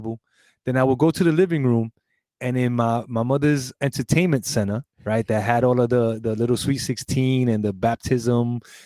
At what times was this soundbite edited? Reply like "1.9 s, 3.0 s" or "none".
3.7 s, 4.9 s